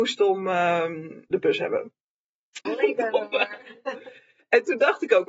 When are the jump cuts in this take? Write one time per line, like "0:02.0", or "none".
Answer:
0:01.3
0:02.7